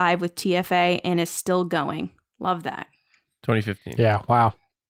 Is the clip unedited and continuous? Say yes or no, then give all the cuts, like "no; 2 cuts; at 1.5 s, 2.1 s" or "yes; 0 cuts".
yes; 0 cuts